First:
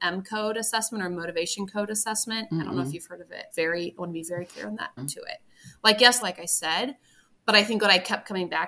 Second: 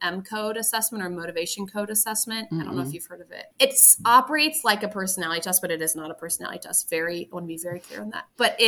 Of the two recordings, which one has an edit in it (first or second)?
first